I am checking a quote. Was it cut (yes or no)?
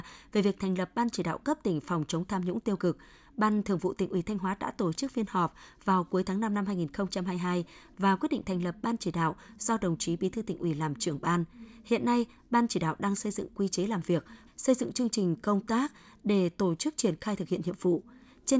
yes